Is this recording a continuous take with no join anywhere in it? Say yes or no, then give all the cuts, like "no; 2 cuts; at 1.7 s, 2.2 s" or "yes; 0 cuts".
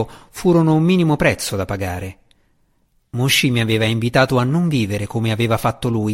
yes; 0 cuts